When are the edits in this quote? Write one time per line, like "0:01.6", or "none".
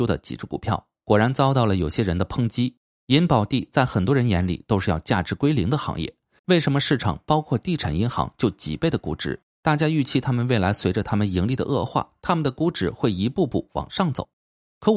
0:06.4